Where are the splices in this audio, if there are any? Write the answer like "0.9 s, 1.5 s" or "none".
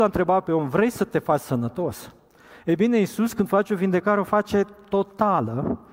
2.5 s